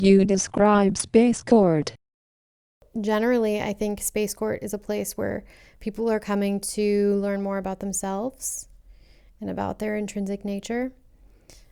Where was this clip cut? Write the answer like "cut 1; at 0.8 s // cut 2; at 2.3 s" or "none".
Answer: none